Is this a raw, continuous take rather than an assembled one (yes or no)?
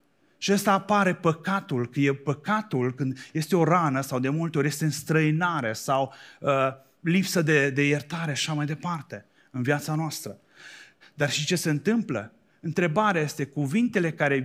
no